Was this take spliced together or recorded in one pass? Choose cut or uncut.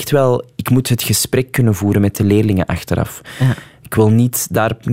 uncut